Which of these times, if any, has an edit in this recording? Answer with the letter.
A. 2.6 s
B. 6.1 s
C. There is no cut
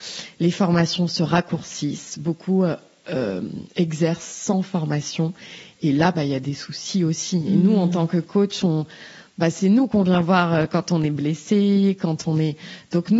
B